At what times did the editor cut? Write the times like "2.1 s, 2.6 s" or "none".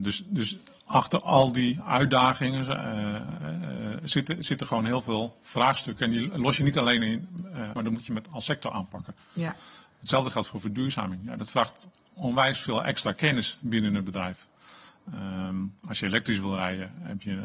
7.7 s